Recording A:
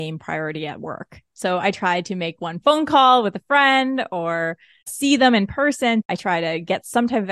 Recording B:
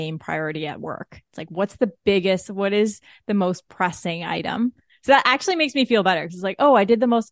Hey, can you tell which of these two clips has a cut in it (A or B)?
A